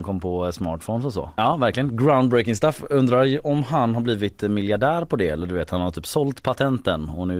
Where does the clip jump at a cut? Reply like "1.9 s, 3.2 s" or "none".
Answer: 1.4 s